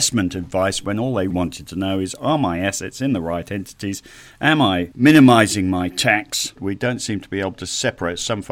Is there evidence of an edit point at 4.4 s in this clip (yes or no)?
no